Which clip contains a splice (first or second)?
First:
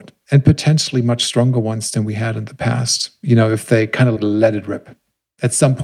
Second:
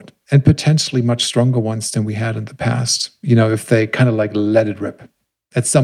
first